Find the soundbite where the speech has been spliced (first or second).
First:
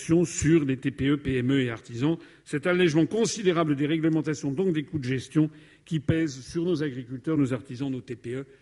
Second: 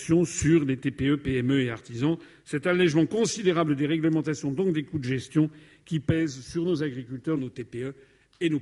second